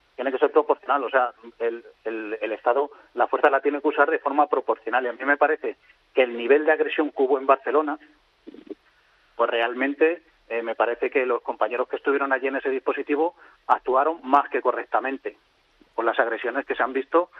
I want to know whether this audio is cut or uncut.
uncut